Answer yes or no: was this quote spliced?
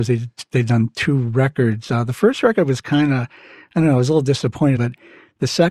yes